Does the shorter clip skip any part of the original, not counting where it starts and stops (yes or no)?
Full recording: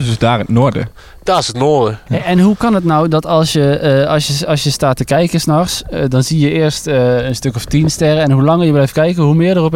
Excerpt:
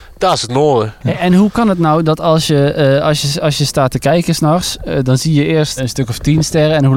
yes